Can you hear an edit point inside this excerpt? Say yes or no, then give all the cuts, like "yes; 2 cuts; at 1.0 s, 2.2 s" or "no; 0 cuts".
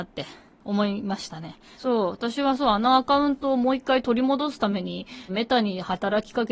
yes; 2 cuts; at 1.7 s, 5.3 s